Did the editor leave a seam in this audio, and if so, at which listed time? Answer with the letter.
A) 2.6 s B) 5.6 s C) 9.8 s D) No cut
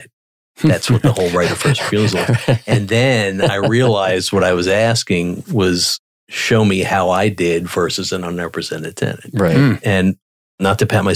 D